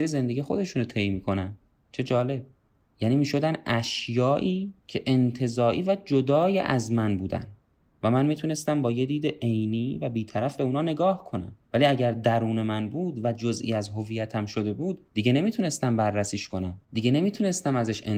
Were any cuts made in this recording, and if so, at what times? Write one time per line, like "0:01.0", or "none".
0:04.8
0:11.6
0:16.8